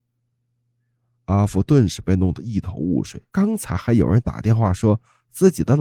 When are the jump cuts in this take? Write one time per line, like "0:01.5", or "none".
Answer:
0:03.3